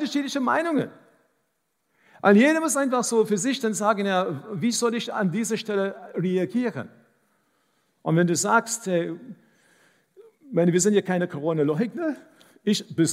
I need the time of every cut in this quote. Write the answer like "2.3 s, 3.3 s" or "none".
none